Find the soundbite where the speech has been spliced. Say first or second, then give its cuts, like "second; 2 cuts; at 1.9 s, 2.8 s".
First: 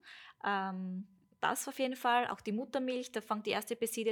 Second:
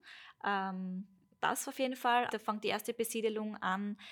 second; 1 cut; at 2.3 s